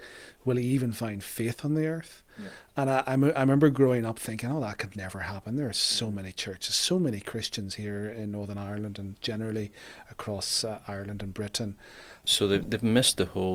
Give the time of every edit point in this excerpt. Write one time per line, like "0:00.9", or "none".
0:12.2